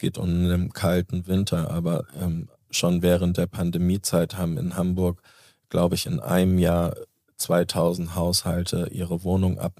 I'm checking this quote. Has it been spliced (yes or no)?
no